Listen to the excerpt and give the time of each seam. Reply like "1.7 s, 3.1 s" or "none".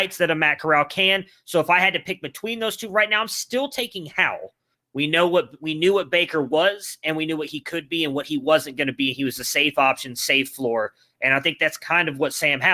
4.7 s